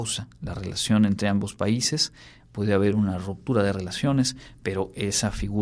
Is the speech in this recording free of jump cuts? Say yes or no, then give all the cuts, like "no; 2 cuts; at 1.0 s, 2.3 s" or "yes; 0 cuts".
no; 1 cut; at 2.4 s